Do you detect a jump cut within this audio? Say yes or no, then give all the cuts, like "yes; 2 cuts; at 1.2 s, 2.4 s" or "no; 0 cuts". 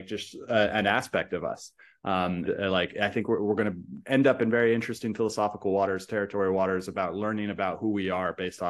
yes; 1 cut; at 2.4 s